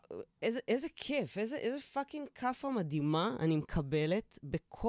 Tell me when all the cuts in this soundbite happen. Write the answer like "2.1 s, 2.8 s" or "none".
none